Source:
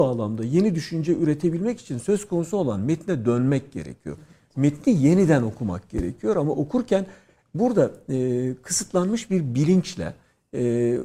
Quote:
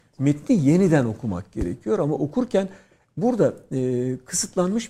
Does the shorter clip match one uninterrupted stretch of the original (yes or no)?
yes